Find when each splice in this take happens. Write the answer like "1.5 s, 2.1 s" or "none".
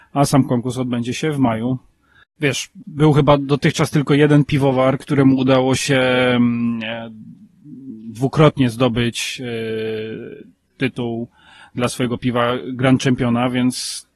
2.2 s